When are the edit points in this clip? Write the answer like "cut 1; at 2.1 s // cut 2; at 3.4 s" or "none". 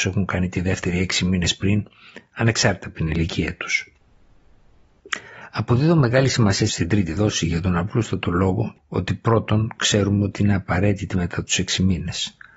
none